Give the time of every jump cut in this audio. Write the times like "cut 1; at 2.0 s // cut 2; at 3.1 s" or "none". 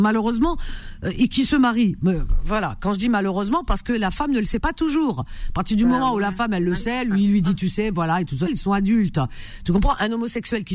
cut 1; at 8.5 s